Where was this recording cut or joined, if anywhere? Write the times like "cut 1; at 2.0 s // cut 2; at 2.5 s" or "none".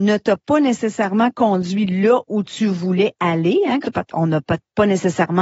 cut 1; at 3.8 s

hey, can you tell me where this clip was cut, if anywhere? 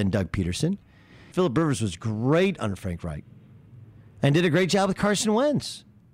cut 1; at 1.3 s

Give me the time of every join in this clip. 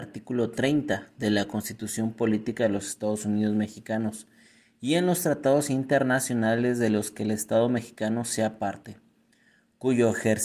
none

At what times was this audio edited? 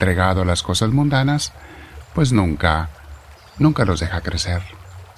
none

